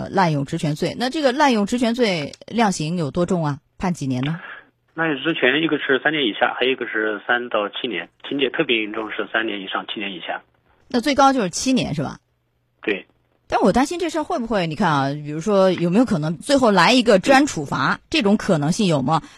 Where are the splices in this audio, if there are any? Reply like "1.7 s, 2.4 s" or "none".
16.3 s